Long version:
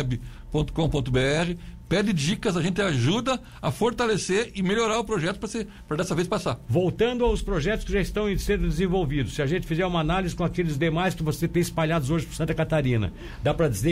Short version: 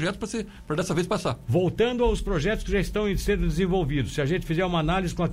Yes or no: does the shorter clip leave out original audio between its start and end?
no